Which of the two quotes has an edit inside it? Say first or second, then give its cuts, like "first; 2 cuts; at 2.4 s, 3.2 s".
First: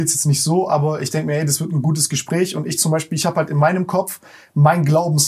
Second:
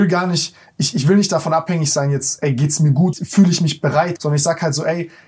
second; 2 cuts; at 3.1 s, 4.2 s